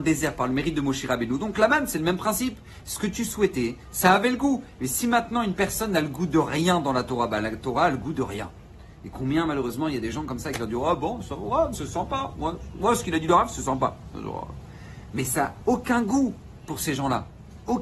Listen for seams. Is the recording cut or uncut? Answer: cut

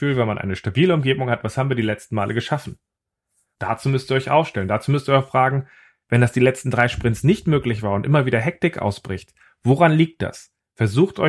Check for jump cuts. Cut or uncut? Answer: cut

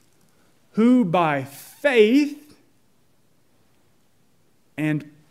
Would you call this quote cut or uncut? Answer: uncut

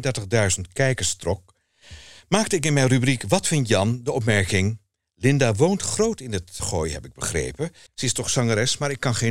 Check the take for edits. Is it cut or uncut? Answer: cut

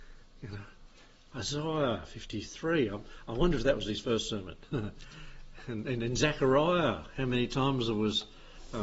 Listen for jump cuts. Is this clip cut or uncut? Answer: uncut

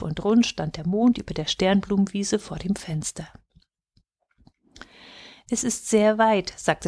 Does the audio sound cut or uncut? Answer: uncut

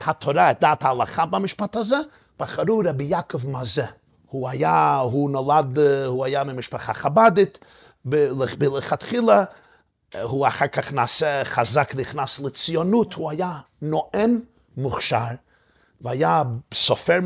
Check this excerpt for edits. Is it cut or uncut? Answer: cut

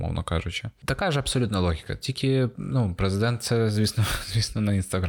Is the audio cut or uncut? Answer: uncut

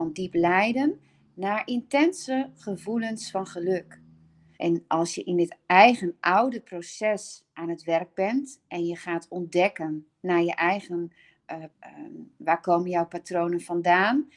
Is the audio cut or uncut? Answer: cut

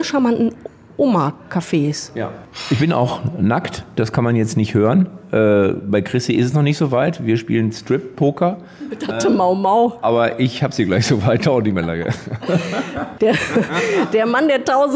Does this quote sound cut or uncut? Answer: uncut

